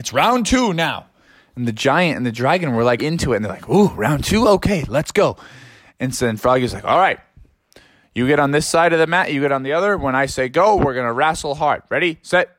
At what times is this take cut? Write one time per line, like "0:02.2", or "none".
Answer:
0:03.0